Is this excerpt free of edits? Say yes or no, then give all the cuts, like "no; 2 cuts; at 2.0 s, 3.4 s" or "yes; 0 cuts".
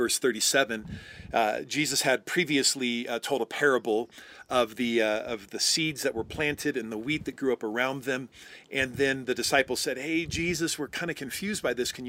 yes; 0 cuts